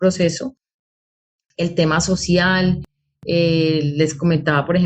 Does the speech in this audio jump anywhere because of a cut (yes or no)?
no